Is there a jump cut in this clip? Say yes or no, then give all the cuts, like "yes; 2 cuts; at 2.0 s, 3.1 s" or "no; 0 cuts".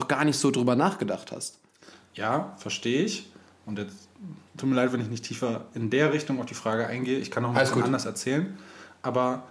yes; 1 cut; at 4.5 s